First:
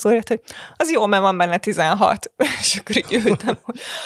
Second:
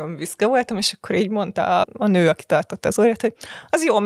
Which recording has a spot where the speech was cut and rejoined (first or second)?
second